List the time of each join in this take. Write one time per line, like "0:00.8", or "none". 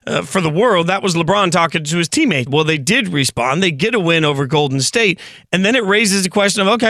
0:02.5